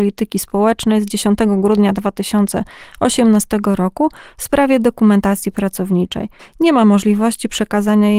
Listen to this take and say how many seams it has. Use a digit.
1